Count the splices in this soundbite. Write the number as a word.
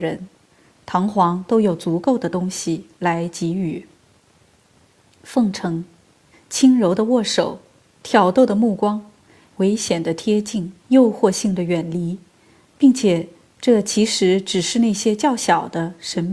three